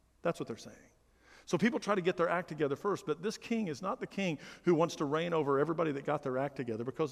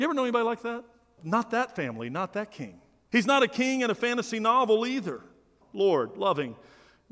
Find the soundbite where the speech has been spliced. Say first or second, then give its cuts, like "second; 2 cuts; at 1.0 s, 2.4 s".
second; 3 cuts; at 1.2 s, 3.1 s, 5.6 s